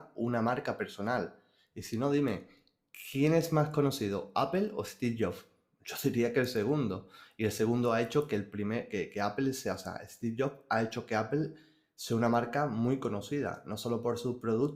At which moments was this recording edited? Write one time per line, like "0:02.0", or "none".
none